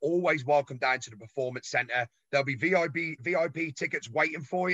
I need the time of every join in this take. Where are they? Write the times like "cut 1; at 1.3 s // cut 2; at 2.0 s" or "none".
cut 1; at 3.2 s